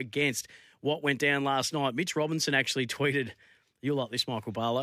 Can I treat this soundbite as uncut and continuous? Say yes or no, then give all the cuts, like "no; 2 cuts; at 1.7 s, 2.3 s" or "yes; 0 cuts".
yes; 0 cuts